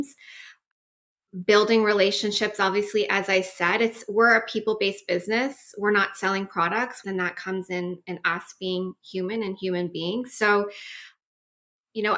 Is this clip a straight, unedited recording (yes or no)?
no